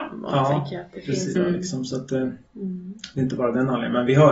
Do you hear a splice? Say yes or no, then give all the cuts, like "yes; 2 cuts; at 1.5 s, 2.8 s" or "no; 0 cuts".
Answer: yes; 2 cuts; at 1.4 s, 2.5 s